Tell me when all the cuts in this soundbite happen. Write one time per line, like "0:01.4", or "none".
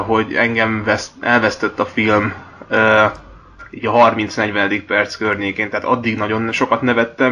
none